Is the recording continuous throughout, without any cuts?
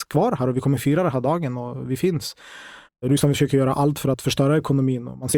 no; 1 cut; at 2.9 s

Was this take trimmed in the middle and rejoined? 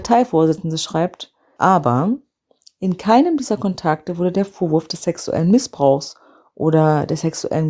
yes; 1 cut; at 1.6 s

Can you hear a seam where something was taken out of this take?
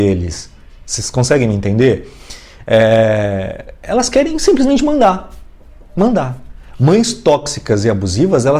no; 0 cuts

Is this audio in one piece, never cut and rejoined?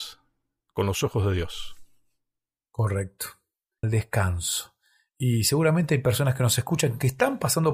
no; 1 cut; at 3.8 s

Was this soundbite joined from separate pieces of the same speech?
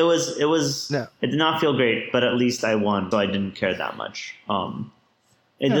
yes; 1 cut; at 3.1 s

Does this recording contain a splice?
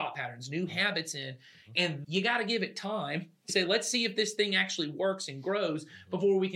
yes; 2 cuts; at 2.0 s, 3.5 s

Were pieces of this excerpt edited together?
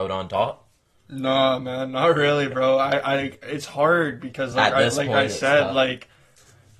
no; 0 cuts

